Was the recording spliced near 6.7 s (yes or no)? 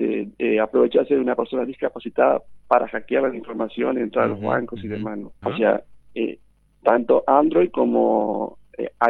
no